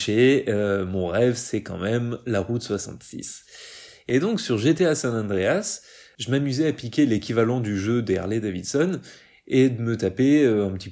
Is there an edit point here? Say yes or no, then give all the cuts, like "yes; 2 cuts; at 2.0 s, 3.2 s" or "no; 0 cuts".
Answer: no; 0 cuts